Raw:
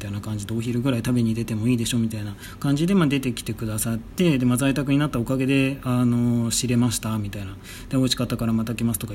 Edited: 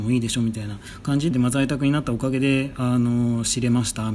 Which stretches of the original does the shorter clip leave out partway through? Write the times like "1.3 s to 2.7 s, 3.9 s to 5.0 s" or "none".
2.9 s to 4.4 s